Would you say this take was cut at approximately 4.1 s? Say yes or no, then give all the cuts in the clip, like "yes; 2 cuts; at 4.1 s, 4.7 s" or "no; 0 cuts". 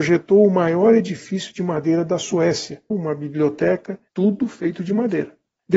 yes; 2 cuts; at 2.9 s, 4.1 s